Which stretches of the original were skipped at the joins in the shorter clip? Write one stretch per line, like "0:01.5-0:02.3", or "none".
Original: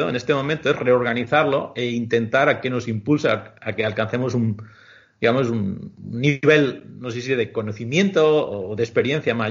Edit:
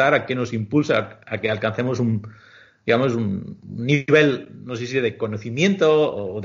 none

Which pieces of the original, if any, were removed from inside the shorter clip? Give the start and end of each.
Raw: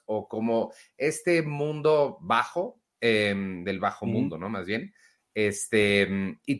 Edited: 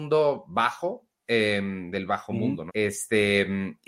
0:04.4-0:05.3

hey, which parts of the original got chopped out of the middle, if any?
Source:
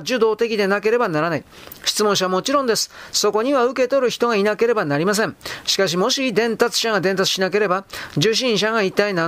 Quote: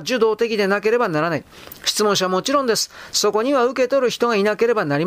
none

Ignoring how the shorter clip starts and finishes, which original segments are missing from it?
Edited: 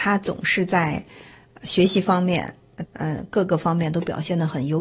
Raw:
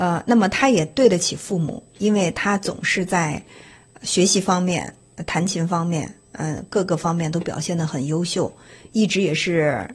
0:05.3-0:06.2

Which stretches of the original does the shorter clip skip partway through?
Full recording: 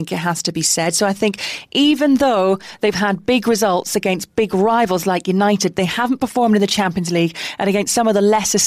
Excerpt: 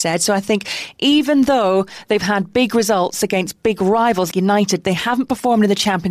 0:05.0-0:05.2

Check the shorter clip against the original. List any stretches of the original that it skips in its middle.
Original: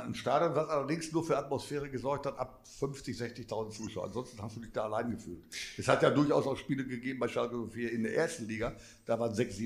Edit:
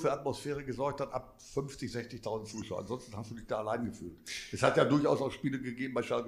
none

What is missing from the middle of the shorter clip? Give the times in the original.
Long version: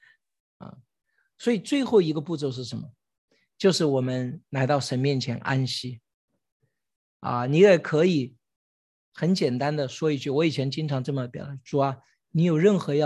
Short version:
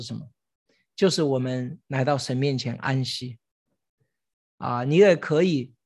none

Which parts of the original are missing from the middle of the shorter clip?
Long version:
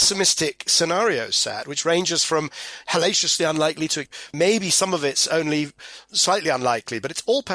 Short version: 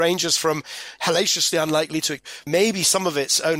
none

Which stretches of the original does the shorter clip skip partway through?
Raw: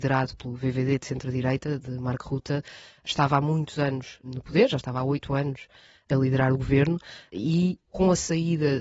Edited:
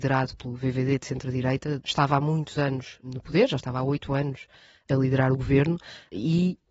0:01.8-0:03.0

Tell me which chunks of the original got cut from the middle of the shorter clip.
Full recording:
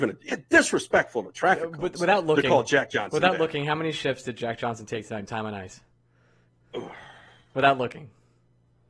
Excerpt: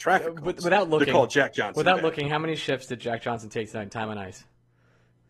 none

